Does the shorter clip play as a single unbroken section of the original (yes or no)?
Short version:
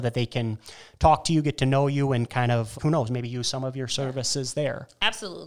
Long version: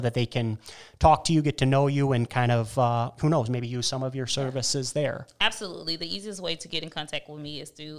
no